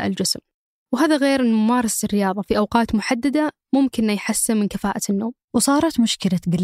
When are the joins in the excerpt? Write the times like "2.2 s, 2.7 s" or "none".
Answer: 5.4 s